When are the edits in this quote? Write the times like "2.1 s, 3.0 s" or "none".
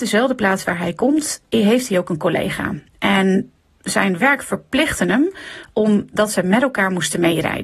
none

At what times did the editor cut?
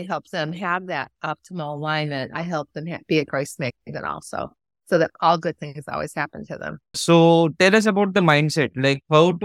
6.9 s

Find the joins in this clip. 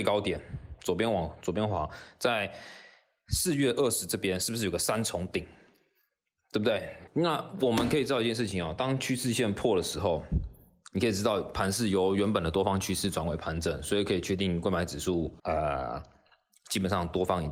7.1 s, 15.4 s

